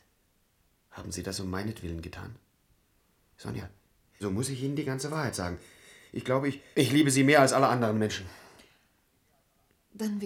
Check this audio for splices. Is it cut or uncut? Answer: cut